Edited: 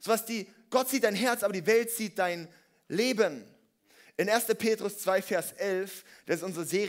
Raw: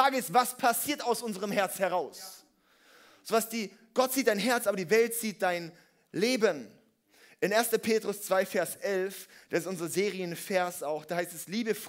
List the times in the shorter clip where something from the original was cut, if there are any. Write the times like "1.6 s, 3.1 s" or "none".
none